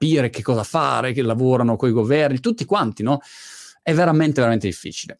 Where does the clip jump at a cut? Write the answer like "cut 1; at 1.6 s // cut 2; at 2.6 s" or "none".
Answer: none